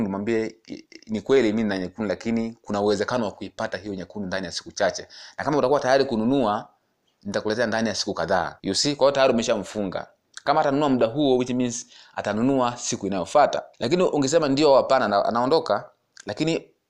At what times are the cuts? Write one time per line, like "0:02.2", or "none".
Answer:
0:08.6
0:13.7

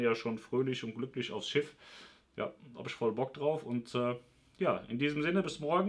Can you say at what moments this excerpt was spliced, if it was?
none

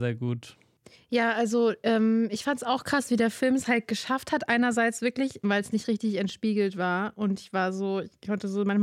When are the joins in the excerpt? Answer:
0:05.4

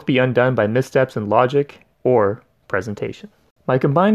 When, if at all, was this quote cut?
0:01.9

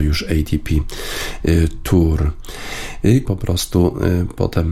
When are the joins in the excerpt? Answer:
0:03.2

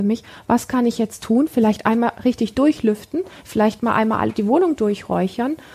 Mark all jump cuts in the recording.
none

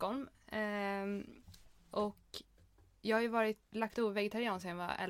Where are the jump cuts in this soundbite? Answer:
0:03.7

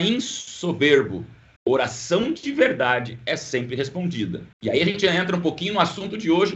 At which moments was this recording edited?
0:01.6
0:04.5

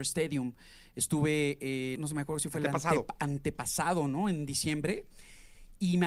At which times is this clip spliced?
0:02.0

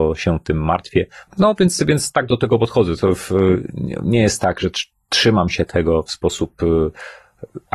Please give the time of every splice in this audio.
0:01.3

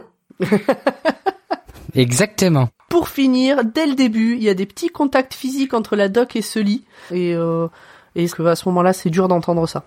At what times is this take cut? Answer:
0:07.1
0:08.3

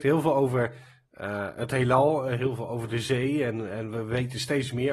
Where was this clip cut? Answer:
none

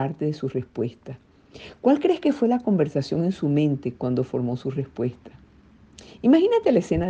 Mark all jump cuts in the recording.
none

